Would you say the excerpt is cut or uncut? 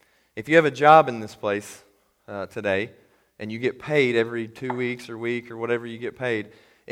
uncut